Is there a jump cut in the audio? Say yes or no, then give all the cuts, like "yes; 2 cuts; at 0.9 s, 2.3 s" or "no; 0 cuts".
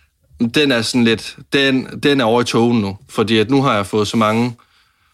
no; 0 cuts